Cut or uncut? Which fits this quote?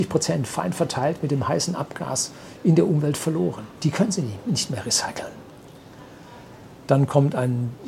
uncut